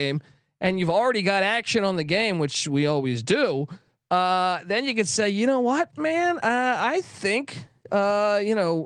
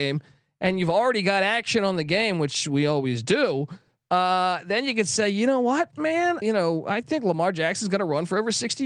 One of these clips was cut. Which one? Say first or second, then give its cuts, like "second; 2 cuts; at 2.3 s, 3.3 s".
second; 1 cut; at 6.4 s